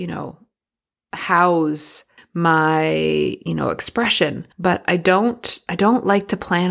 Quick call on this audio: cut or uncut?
cut